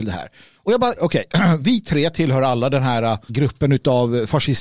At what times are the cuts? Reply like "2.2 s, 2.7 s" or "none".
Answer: 1.0 s, 3.3 s